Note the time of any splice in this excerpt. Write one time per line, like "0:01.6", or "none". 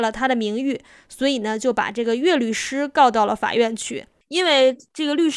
none